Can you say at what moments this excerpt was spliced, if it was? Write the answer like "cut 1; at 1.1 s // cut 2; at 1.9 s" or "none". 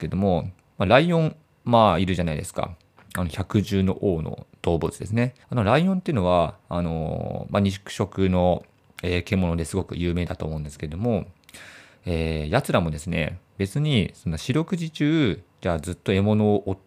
cut 1; at 5.4 s